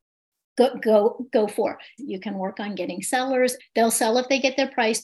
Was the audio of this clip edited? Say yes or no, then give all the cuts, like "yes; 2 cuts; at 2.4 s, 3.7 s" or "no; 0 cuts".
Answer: yes; 2 cuts; at 2.0 s, 3.6 s